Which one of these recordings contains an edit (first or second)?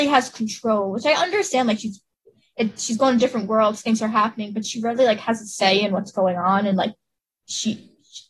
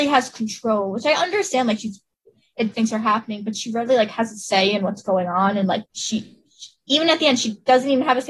second